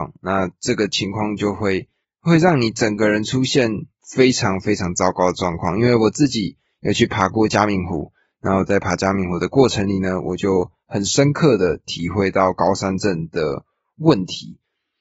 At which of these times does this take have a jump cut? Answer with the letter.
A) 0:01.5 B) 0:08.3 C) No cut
C